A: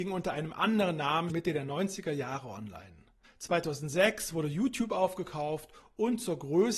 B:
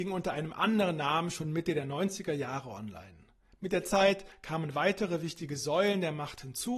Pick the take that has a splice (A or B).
A